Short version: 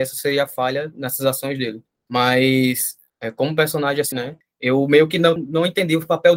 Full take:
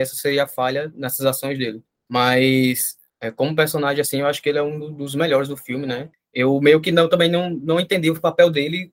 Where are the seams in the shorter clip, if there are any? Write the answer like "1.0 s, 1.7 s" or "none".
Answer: 4.1 s, 5.4 s